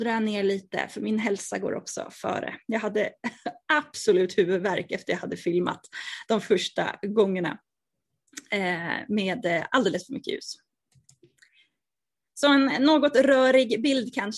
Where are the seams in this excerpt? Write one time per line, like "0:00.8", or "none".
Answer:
none